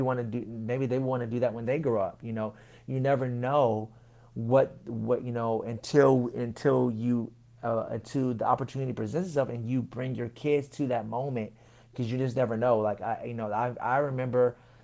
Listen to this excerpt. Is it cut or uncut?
uncut